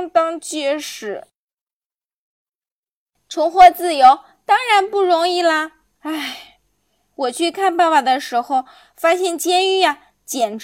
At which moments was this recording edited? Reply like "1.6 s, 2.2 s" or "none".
5.9 s